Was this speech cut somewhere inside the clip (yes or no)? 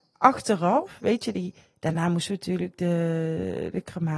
no